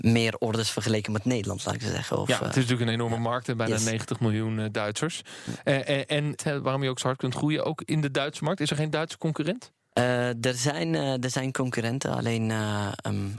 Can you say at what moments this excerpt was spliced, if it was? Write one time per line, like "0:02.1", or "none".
0:06.4

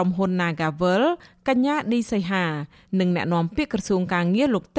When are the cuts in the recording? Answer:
none

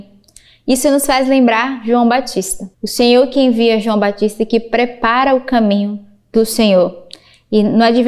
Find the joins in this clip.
0:02.7

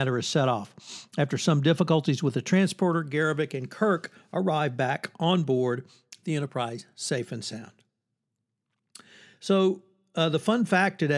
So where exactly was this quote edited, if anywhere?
none

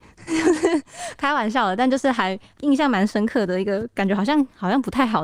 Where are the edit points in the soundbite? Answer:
none

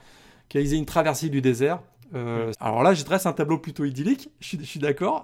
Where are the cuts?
0:02.5

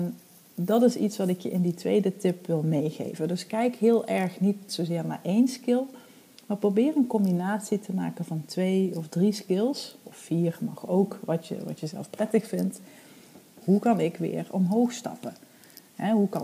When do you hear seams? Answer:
0:13.6

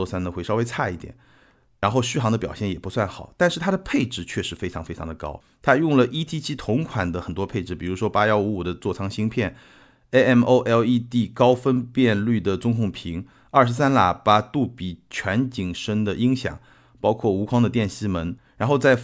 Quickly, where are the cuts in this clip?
none

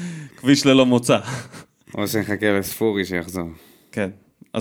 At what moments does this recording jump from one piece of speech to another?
none

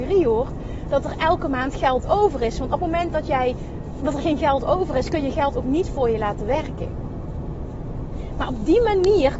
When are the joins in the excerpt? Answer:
none

